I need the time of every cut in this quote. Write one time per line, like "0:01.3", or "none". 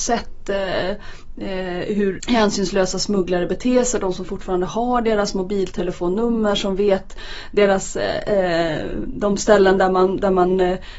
0:02.2